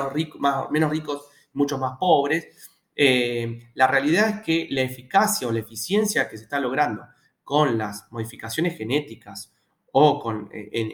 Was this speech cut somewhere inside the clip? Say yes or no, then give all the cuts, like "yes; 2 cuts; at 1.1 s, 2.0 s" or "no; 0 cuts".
no; 0 cuts